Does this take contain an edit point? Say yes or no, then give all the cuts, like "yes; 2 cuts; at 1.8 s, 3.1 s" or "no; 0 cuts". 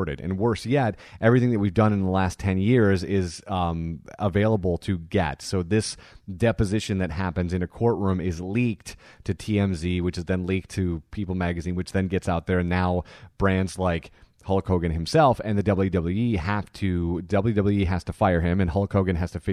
no; 0 cuts